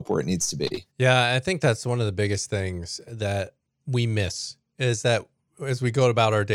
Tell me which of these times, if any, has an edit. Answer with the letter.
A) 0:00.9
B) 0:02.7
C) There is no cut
A